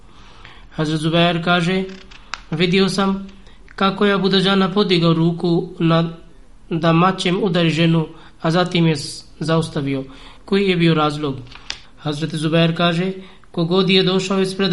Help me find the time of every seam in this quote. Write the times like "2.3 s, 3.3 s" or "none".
10.4 s, 11.8 s